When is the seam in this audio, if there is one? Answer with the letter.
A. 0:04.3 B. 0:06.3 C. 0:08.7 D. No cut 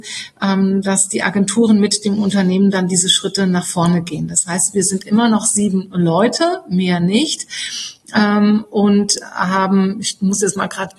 D